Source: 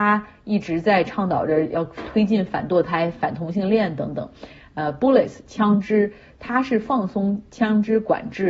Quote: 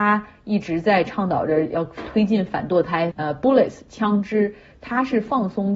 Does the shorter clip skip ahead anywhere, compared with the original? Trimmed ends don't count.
yes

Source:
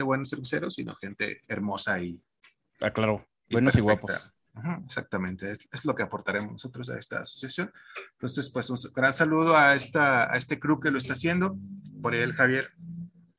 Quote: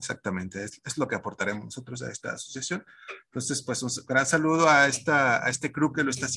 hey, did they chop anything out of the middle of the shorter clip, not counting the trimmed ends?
no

